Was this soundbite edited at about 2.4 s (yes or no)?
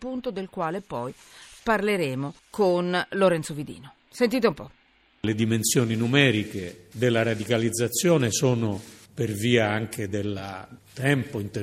yes